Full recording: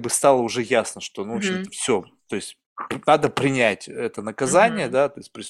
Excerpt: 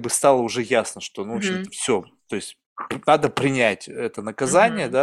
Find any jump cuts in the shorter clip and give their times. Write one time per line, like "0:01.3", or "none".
none